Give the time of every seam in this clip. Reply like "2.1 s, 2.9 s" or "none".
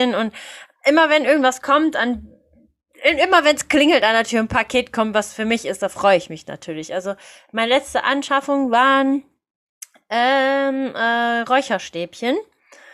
none